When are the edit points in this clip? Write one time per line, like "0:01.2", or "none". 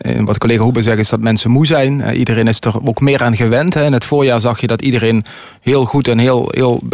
none